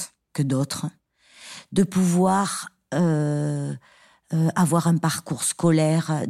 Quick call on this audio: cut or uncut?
uncut